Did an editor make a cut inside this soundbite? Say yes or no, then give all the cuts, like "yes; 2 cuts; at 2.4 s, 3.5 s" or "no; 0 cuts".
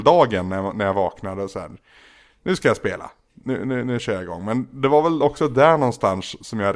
no; 0 cuts